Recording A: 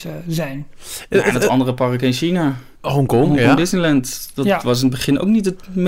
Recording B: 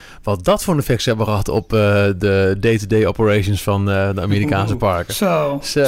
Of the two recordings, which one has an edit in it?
A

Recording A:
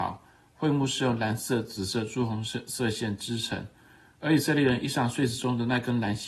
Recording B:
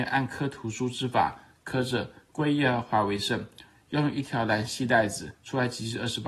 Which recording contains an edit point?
B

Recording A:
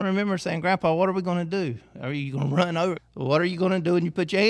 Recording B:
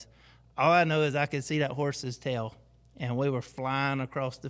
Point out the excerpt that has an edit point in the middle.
A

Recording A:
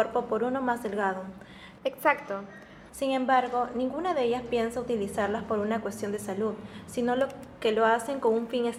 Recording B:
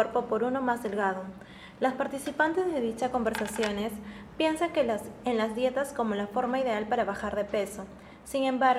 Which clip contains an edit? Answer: A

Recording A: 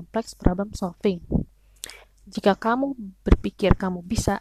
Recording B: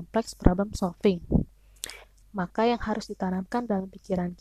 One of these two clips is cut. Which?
B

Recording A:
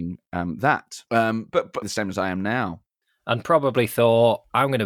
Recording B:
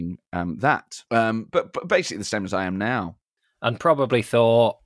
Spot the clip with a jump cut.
A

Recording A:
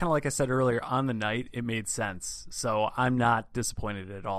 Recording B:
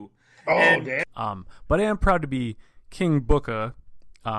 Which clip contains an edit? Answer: B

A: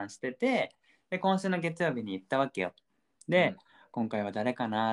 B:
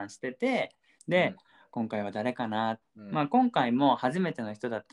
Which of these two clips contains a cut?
B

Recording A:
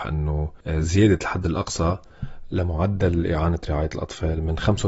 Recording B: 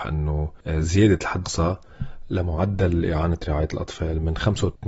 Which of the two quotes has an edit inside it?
B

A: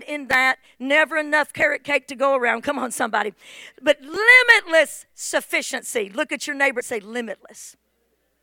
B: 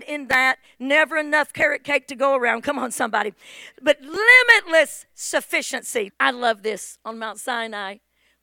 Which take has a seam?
B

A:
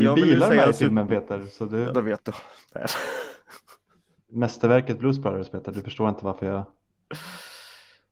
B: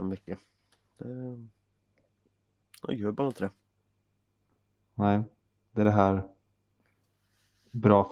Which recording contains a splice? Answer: A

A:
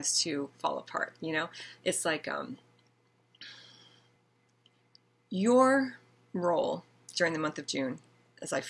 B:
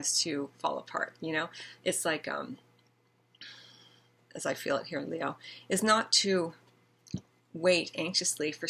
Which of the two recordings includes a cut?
B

